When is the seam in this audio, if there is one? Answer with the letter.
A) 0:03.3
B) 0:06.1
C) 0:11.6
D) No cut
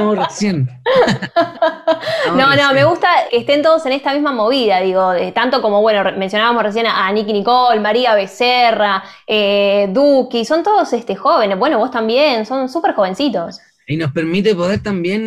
A